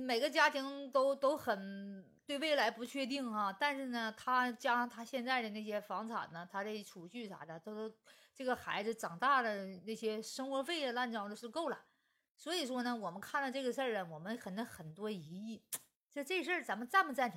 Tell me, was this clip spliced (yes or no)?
no